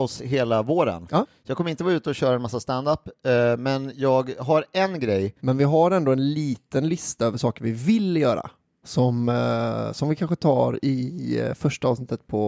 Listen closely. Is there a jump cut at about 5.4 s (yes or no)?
yes